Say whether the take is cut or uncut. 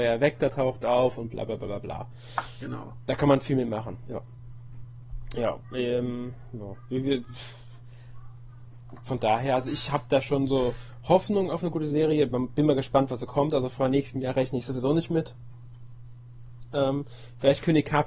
uncut